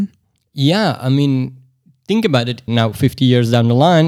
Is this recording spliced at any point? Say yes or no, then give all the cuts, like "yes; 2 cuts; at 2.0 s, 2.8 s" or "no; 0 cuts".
yes; 1 cut; at 2.7 s